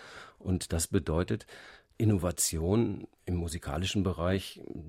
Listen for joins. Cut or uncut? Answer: cut